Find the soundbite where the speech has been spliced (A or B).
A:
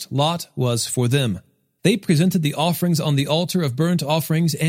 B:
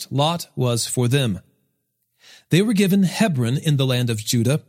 A